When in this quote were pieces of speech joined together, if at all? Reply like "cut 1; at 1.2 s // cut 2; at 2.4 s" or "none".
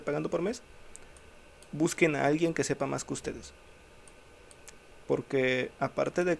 cut 1; at 5.0 s